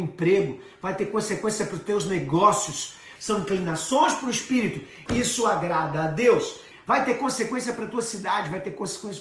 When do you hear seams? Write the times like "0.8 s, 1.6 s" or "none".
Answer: 3.2 s, 5.1 s, 6.7 s